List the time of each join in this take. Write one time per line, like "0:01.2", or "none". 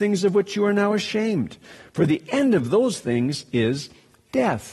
none